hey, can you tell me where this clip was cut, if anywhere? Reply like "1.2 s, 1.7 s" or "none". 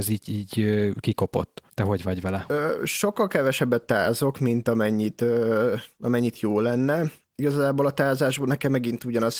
1.7 s